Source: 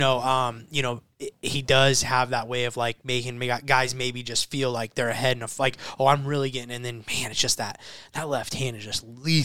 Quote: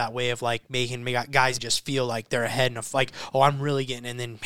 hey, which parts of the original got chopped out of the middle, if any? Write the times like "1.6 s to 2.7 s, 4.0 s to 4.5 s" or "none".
3.9 s to 4.2 s